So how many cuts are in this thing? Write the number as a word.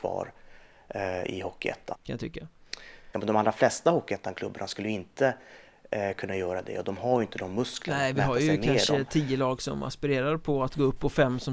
two